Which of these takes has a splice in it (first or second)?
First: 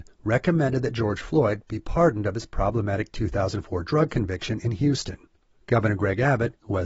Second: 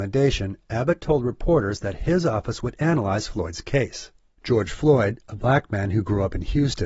second